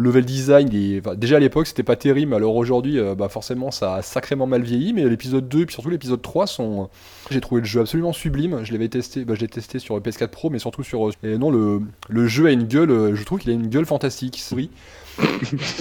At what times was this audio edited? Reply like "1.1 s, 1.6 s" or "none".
7.3 s, 11.1 s, 14.5 s